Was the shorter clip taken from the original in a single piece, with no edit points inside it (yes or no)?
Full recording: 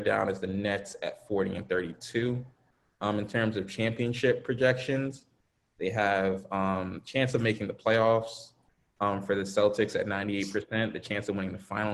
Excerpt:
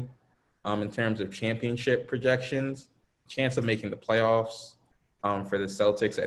no